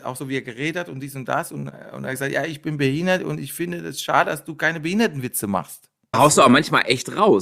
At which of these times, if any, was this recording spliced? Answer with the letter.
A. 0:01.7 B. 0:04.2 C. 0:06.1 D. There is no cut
C